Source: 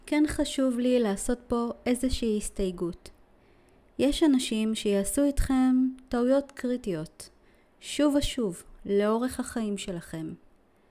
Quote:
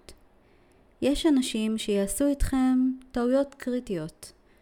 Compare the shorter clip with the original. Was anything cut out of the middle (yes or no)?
no